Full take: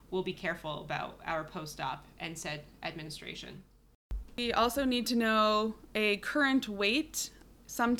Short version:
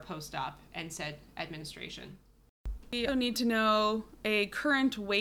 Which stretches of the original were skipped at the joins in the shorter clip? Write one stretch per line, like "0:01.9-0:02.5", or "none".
0:04.5-0:04.8